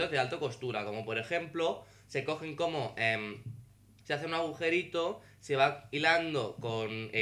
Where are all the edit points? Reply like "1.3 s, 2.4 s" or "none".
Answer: 4.0 s